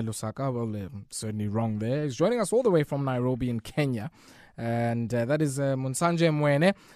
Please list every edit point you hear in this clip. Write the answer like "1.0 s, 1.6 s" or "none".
none

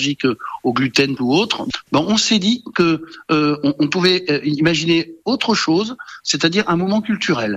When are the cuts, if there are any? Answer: 1.2 s

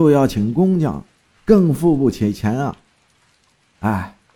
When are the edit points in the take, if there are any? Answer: none

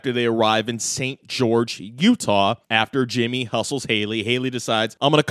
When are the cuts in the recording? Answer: none

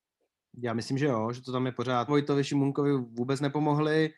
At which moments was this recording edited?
2.1 s

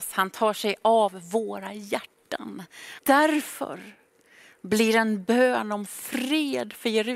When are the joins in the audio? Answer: 3.0 s

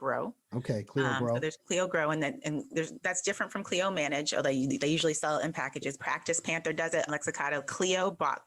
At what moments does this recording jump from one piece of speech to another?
1.6 s, 6.0 s, 7.1 s

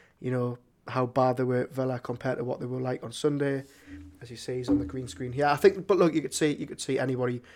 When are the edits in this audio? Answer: none

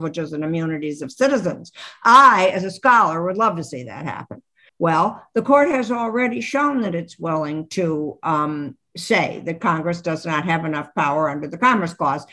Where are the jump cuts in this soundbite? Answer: 4.7 s

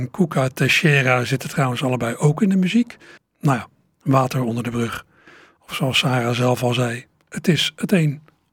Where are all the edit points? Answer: 3.2 s

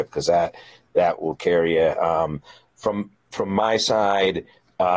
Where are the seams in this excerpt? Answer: none

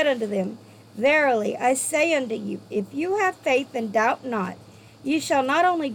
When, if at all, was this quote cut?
none

